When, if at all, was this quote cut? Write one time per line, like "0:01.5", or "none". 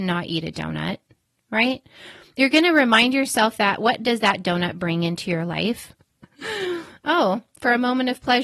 0:05.9